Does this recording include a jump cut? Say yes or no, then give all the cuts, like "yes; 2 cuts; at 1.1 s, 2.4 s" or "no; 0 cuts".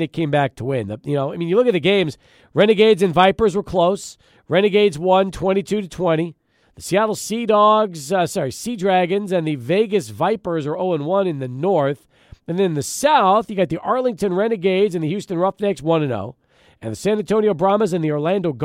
yes; 1 cut; at 6.6 s